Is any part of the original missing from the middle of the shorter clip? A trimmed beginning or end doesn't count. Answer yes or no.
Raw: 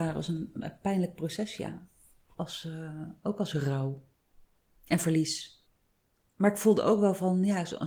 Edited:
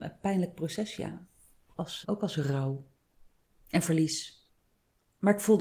yes